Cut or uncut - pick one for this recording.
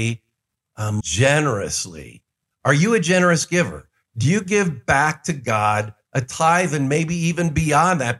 cut